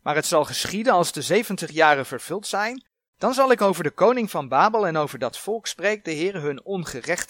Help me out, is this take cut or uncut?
uncut